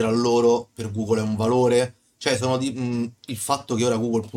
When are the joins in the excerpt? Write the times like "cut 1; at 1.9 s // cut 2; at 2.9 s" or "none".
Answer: none

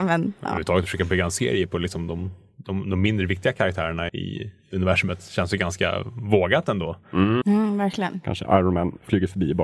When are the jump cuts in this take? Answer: cut 1; at 4.1 s // cut 2; at 7.4 s

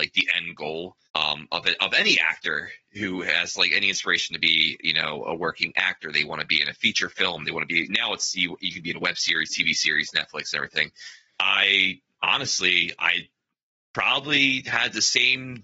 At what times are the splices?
cut 1; at 1.0 s // cut 2; at 11.3 s

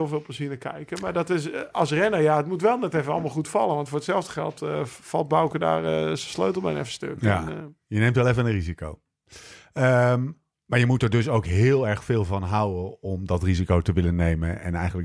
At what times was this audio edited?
none

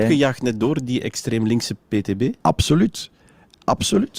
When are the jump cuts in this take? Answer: none

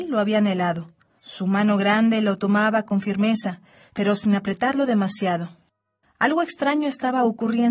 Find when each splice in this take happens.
cut 1; at 1.2 s // cut 2; at 6.0 s

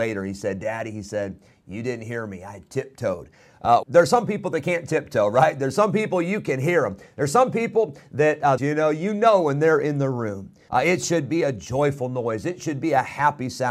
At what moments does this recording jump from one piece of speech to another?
cut 1; at 3.8 s // cut 2; at 8.6 s // cut 3; at 10.7 s

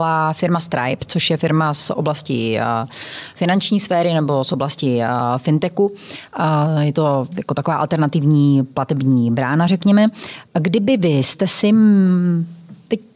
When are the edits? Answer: none

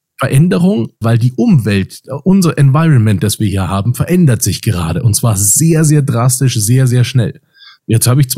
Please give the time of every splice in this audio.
cut 1; at 1.0 s

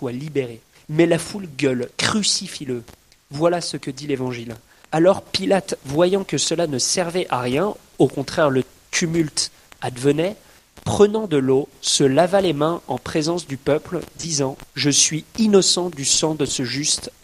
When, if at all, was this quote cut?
cut 1; at 14.7 s

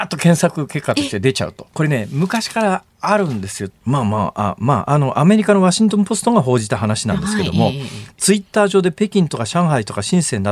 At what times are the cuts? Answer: cut 1; at 1.7 s // cut 2; at 3.7 s

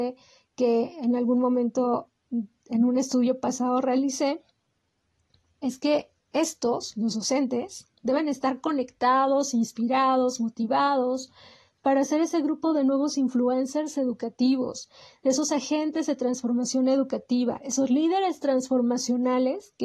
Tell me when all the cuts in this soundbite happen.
none

